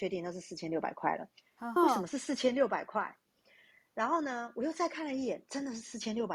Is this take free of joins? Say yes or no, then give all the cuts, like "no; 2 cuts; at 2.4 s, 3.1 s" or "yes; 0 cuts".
no; 1 cut; at 1.8 s